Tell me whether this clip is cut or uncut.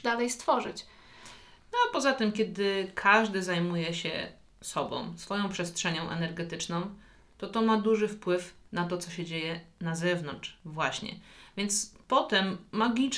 uncut